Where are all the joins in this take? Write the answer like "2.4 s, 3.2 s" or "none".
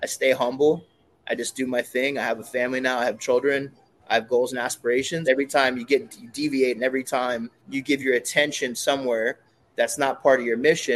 5.3 s, 7.6 s